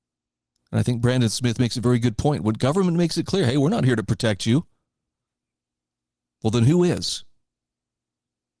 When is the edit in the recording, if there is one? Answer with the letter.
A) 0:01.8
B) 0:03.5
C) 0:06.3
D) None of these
D